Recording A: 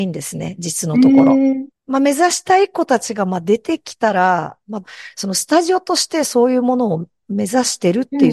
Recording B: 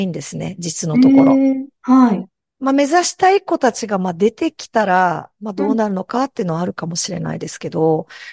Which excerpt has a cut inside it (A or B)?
A